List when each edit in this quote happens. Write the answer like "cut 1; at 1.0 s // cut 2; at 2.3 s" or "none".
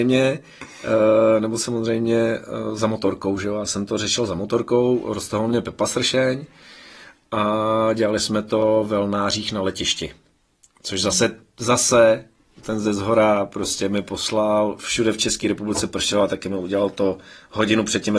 none